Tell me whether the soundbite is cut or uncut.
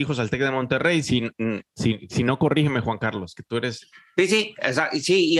uncut